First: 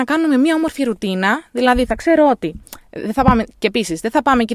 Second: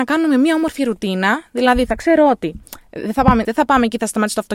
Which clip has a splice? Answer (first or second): second